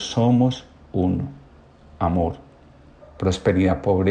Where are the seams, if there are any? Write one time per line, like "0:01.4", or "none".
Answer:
0:03.0